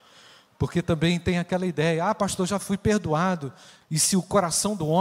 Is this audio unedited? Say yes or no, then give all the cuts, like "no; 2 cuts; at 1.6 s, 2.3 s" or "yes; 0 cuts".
no; 1 cut; at 3.8 s